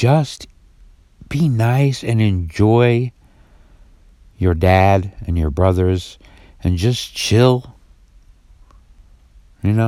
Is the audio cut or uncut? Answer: uncut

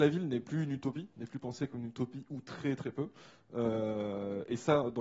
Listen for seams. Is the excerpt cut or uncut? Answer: uncut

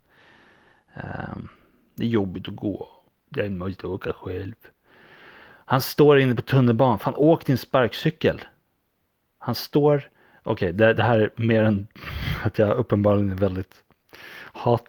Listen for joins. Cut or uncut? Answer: cut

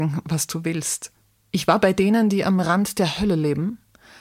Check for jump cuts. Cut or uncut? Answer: cut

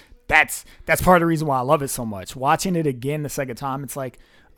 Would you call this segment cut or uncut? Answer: uncut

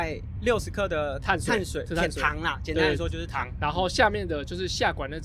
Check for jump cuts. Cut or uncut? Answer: uncut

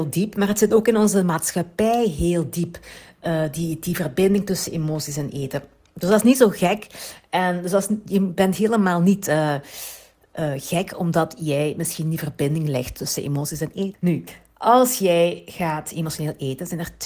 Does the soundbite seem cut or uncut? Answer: cut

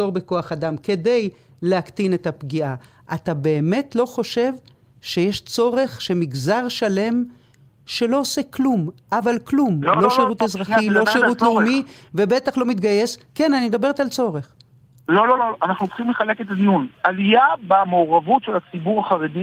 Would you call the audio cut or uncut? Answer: cut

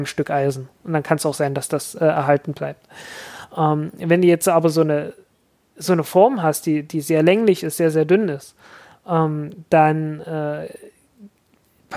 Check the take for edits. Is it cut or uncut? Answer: uncut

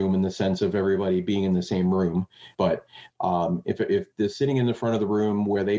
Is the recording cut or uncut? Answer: cut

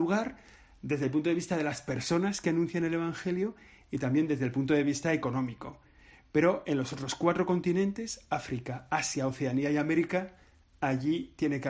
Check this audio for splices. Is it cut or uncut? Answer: uncut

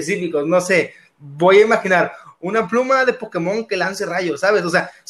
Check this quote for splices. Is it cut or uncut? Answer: uncut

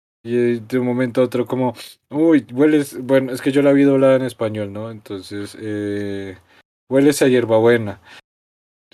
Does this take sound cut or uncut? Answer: uncut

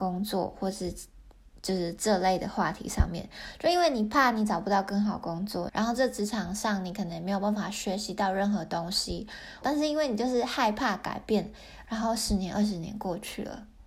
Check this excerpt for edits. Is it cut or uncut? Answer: cut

